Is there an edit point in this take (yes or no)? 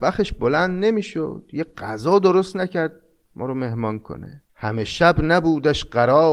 yes